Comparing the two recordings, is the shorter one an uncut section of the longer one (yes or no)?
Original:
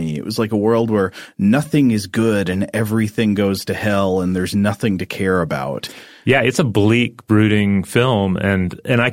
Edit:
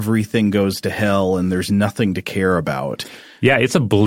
yes